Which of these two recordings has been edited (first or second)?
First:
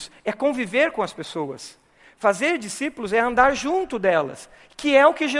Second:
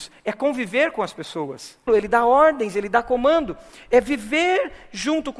second